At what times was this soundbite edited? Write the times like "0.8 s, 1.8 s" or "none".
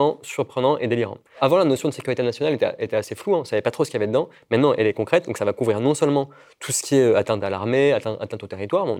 none